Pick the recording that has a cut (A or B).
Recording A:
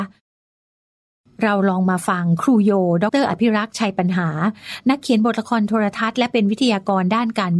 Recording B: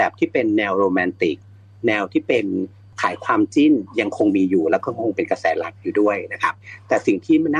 A